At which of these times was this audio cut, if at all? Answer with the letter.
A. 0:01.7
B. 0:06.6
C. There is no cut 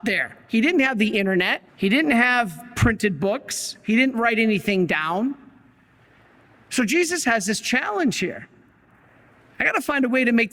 A